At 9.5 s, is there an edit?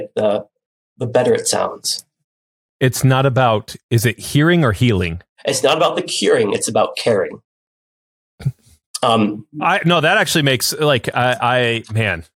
yes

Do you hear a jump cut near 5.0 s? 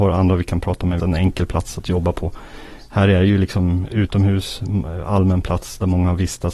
no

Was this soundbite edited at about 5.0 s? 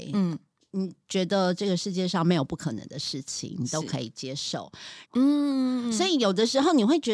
yes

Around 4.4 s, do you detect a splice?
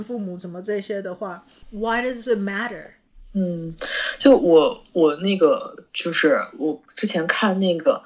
yes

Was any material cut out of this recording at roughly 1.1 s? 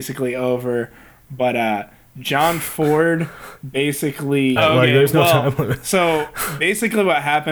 no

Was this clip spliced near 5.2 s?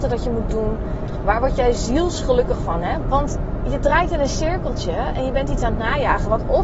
no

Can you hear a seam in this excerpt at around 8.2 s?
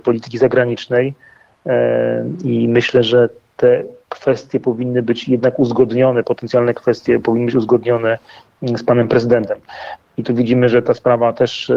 no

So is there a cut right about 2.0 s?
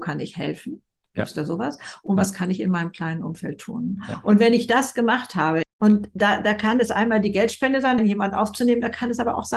no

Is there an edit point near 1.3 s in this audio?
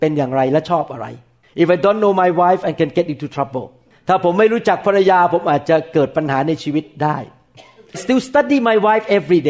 no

